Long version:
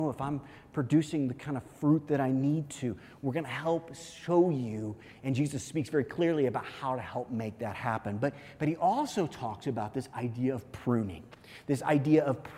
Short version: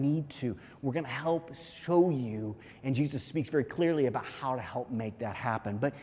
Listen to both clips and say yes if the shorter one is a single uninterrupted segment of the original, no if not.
yes